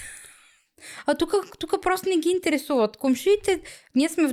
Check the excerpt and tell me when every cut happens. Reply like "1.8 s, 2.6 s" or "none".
none